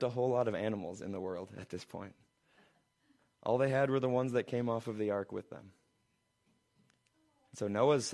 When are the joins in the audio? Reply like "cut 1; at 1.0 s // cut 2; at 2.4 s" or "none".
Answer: none

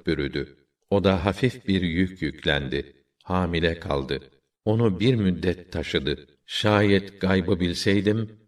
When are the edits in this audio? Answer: cut 1; at 6.4 s

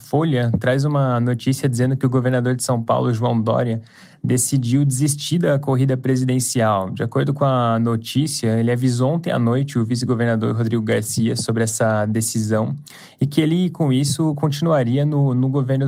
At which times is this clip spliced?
none

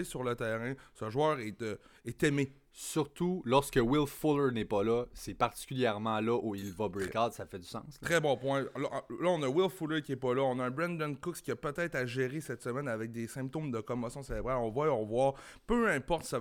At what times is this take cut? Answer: none

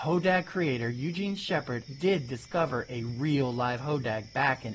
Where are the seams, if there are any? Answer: cut 1; at 1.9 s

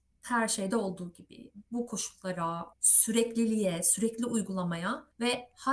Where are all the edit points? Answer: cut 1; at 2.7 s

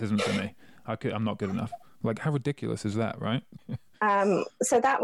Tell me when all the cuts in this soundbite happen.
cut 1; at 3.6 s

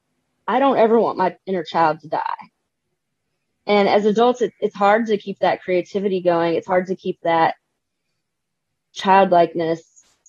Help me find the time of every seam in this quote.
none

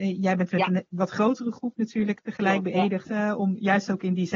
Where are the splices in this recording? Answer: cut 1; at 3.0 s

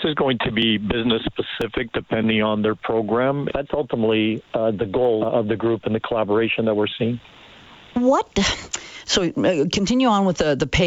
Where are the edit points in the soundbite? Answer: cut 1; at 3.5 s // cut 2; at 5.2 s

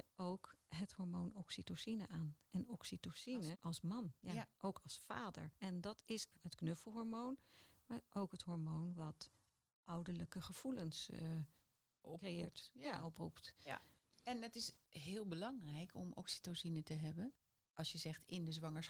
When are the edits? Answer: cut 1; at 3.5 s // cut 2; at 12.0 s // cut 3; at 14.0 s

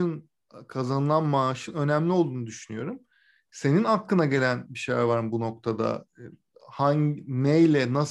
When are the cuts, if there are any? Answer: none

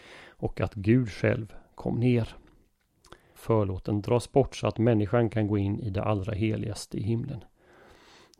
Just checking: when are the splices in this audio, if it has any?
cut 1; at 3.4 s

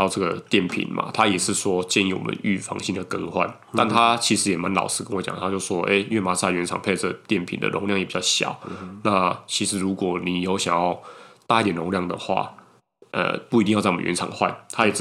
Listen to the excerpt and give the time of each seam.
none

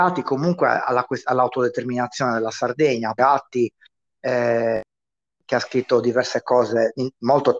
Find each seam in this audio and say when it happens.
cut 1; at 3.2 s

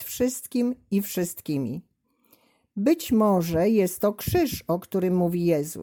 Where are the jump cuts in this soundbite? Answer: none

